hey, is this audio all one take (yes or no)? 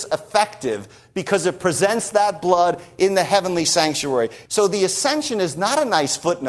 no